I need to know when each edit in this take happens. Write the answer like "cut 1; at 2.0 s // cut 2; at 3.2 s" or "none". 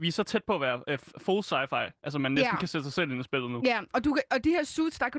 none